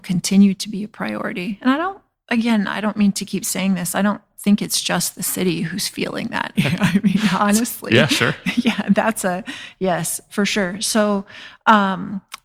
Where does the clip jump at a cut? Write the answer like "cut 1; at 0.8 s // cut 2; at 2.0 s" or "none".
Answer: cut 1; at 6.6 s